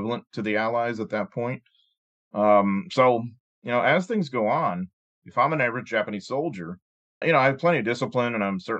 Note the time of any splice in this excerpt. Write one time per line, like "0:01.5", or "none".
0:07.2